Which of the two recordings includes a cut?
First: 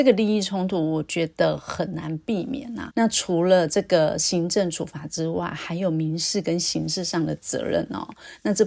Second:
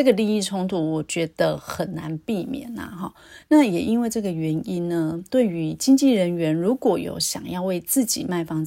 first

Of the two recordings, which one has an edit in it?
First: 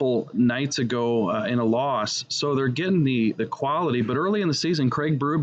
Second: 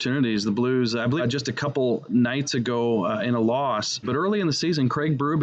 second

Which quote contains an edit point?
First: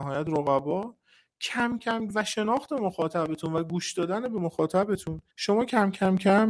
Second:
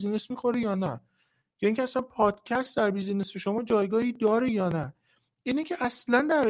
first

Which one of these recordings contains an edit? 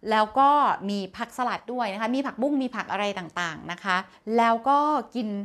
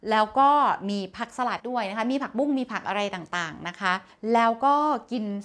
second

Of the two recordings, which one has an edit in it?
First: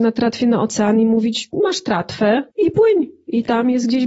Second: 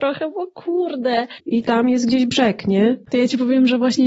second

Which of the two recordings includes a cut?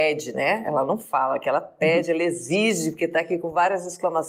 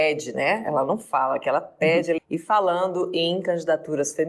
second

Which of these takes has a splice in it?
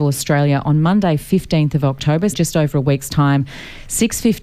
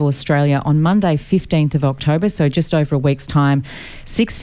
first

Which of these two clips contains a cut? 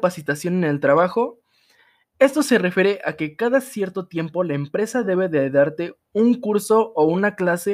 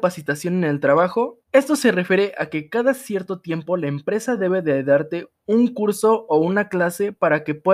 second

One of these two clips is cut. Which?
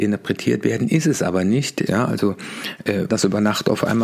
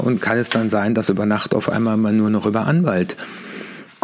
first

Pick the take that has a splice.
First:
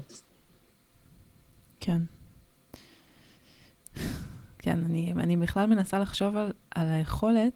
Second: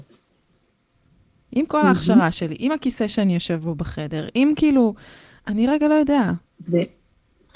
second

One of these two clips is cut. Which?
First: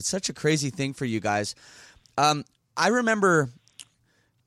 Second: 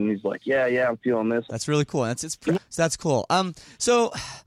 second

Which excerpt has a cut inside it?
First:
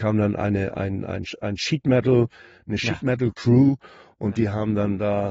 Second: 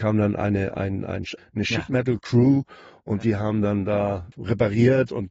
second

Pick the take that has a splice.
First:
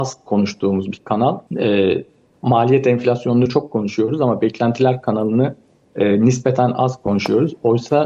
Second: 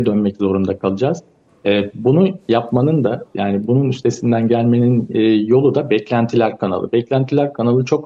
first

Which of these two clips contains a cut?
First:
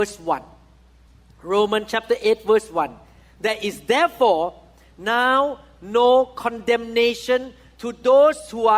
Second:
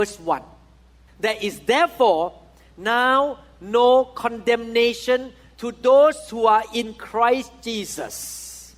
second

